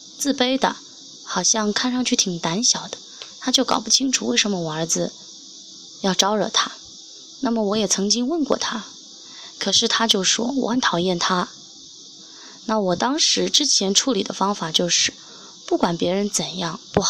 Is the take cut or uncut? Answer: uncut